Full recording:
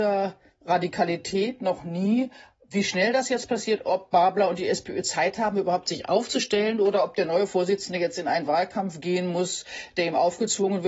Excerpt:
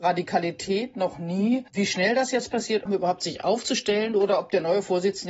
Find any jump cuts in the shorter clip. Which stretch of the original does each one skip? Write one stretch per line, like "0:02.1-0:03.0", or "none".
0:02.3-0:02.7
0:03.8-0:05.5